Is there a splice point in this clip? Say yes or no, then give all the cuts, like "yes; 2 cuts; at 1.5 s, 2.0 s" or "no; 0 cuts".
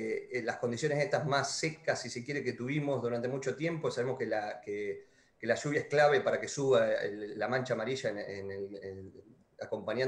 no; 0 cuts